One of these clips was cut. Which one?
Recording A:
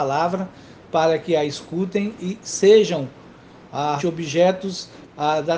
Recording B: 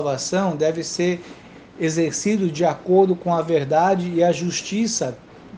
A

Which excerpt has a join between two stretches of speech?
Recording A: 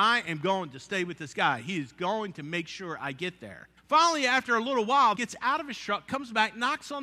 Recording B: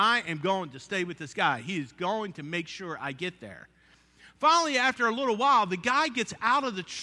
A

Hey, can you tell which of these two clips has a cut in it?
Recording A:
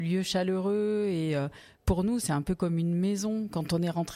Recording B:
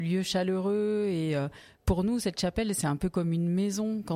A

